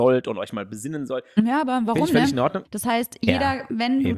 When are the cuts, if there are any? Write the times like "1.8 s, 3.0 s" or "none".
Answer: 2.7 s